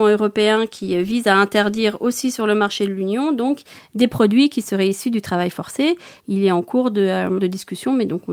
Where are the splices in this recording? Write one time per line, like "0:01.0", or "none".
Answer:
0:06.2